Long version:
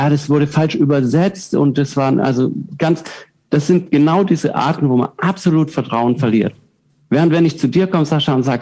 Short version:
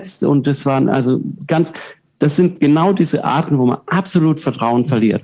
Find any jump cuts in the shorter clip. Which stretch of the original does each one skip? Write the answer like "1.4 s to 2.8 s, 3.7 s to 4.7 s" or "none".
none